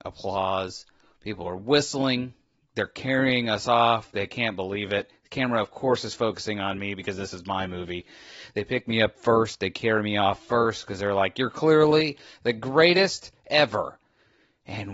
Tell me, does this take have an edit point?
no; 0 cuts

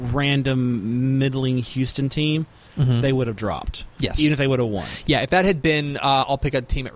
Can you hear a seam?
no; 0 cuts

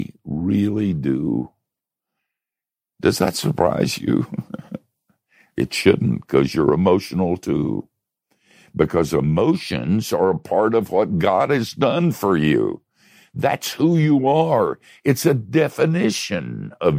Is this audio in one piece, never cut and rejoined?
yes; 0 cuts

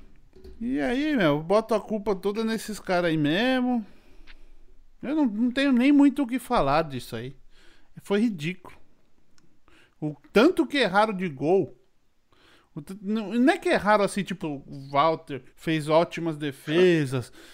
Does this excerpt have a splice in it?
yes; 2 cuts; at 14.4 s, 15.5 s

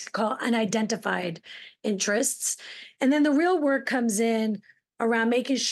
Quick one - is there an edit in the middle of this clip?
yes; 1 cut; at 2.9 s

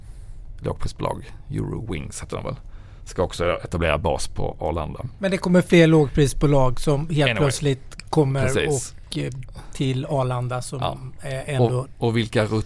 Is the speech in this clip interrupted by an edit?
no; 0 cuts

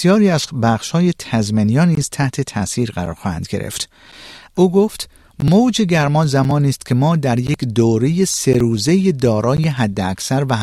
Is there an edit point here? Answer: yes; 1 cut; at 4.5 s

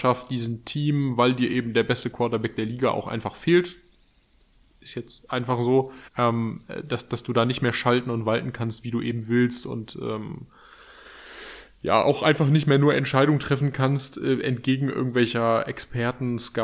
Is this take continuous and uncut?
no; 1 cut; at 6.1 s

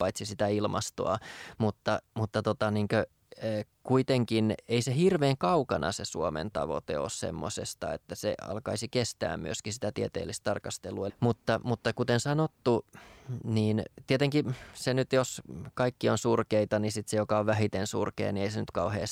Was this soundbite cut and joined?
yes; 1 cut; at 11.1 s

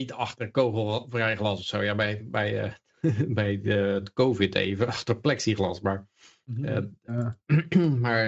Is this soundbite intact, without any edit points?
no; 1 cut; at 7.1 s

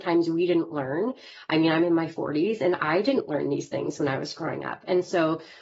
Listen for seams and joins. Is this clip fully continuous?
yes; 0 cuts

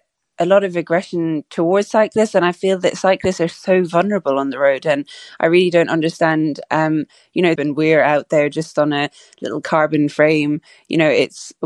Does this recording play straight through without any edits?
no; 1 cut; at 7.6 s

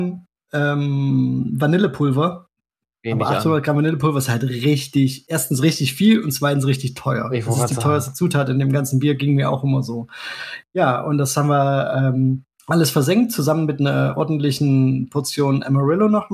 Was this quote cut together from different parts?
yes; 2 cuts; at 3.0 s, 12.5 s

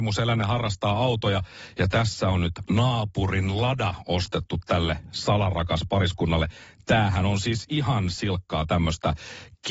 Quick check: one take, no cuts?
yes; 0 cuts

